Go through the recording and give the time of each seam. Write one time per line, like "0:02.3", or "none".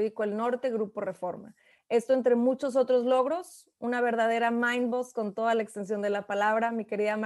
none